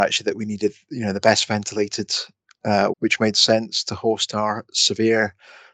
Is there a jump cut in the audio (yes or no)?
yes